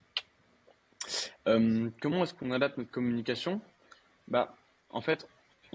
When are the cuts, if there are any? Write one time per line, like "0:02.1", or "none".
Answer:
none